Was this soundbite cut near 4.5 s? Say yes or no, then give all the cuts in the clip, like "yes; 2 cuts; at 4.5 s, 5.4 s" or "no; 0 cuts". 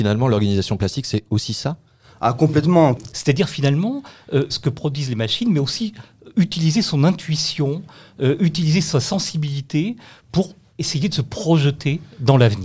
yes; 2 cuts; at 3.1 s, 4.5 s